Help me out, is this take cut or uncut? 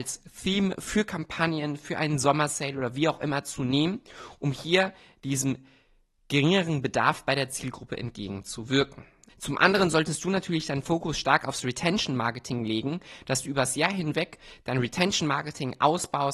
cut